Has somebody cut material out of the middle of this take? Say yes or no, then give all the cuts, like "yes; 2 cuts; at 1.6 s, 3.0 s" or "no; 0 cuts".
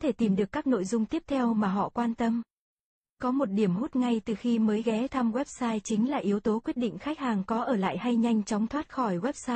no; 0 cuts